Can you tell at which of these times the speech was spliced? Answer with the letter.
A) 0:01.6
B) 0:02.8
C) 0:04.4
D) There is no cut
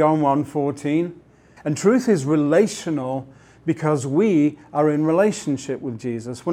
A